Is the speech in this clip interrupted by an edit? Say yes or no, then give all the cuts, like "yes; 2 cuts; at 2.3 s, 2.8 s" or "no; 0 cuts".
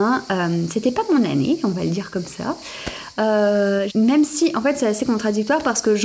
yes; 1 cut; at 3.9 s